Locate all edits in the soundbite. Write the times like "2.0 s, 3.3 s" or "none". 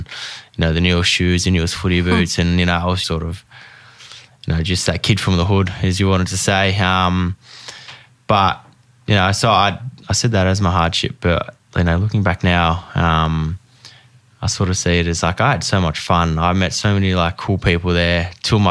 3.0 s